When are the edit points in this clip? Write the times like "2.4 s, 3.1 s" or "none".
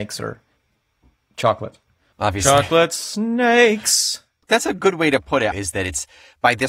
2.1 s, 5.5 s